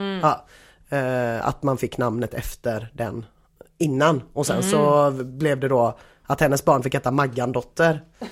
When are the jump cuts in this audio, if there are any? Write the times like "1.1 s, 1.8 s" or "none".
none